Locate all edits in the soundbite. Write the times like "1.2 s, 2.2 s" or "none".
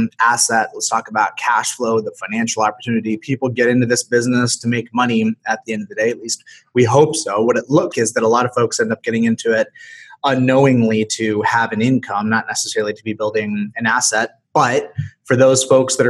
7.9 s, 14.4 s

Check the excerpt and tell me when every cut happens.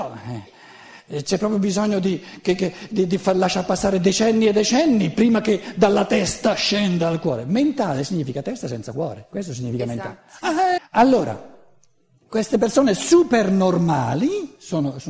10.8 s

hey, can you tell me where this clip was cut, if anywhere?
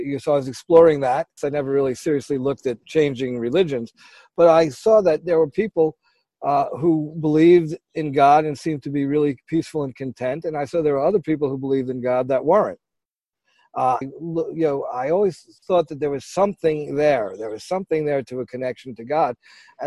1.4 s, 2.8 s, 14.0 s

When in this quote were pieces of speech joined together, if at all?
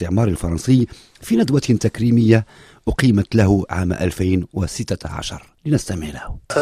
none

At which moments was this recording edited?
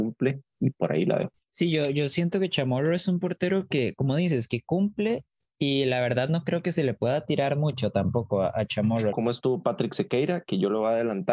9.1 s

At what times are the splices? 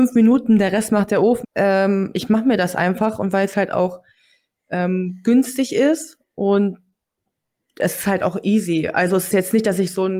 1.4 s

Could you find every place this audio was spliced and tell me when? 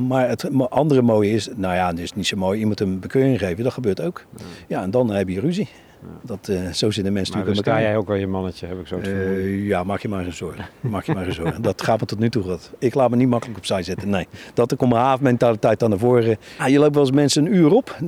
6.2 s, 16.6 s

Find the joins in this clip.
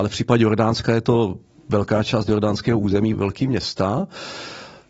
3.1 s

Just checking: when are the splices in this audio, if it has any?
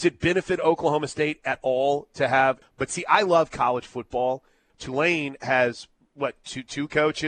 2.6 s, 4.7 s

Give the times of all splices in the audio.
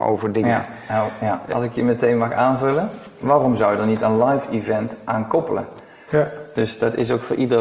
1.5 s, 3.2 s, 6.1 s

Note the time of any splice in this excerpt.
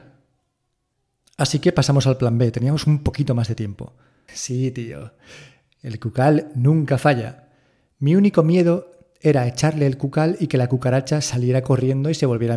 4.3 s

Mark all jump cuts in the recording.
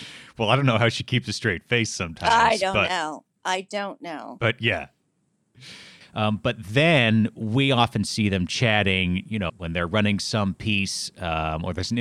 6.0 s, 9.5 s

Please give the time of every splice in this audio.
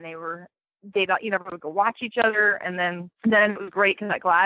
3.1 s

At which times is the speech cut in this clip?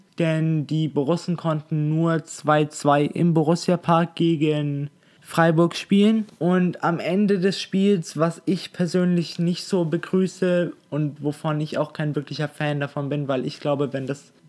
none

